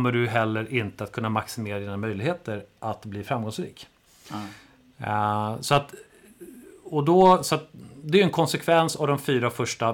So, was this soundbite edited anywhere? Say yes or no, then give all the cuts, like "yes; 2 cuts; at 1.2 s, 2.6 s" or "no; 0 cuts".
no; 0 cuts